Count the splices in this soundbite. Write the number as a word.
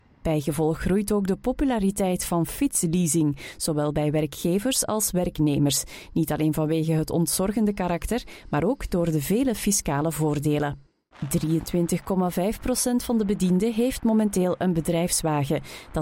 one